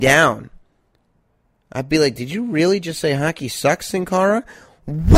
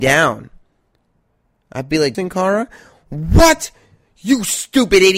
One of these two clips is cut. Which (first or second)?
second